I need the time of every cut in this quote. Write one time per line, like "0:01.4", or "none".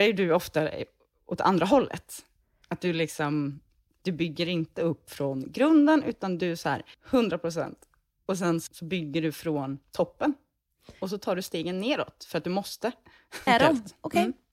0:06.9
0:08.7
0:13.5